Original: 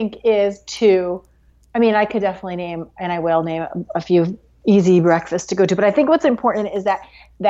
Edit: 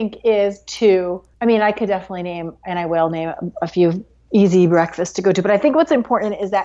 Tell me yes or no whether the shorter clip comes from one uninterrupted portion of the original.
no